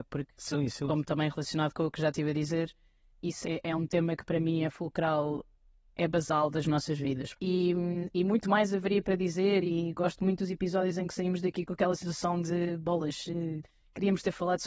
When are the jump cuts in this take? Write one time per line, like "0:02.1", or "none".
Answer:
0:03.4
0:07.3